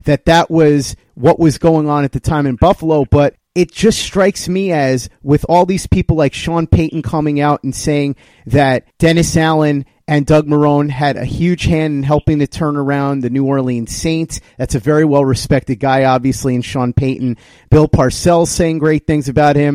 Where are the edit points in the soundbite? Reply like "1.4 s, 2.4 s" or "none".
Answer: none